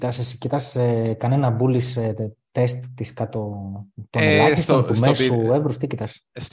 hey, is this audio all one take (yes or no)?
yes